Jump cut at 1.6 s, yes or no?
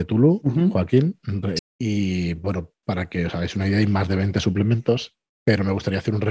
yes